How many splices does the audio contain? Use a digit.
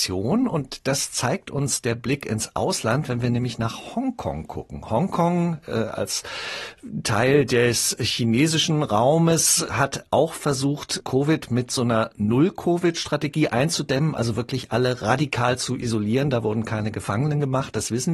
0